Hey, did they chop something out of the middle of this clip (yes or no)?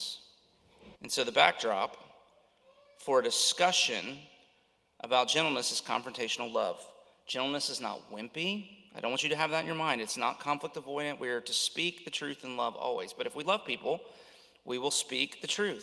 yes